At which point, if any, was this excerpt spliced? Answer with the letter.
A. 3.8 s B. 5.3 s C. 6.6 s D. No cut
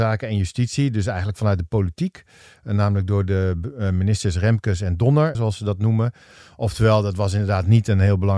B